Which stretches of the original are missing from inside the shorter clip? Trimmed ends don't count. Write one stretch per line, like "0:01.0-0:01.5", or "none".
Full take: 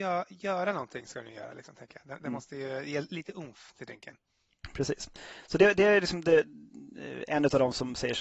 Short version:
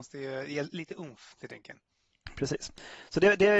none